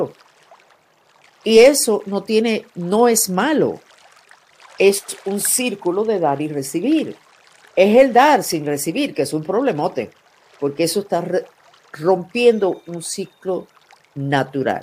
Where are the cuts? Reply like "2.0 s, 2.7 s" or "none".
none